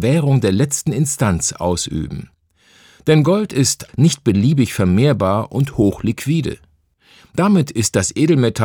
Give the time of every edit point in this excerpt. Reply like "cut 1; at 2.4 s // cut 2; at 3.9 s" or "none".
cut 1; at 3.9 s

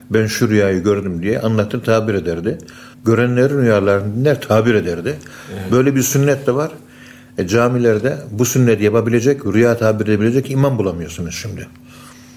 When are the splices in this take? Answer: cut 1; at 2.9 s

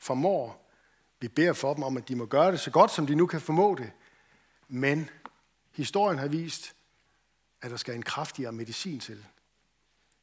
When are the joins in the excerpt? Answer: none

